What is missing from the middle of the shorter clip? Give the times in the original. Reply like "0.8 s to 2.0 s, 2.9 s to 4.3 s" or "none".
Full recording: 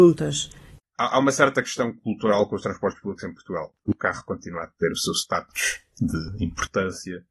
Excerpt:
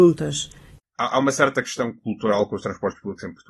none